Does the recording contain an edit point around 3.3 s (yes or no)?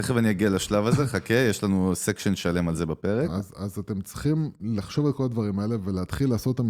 yes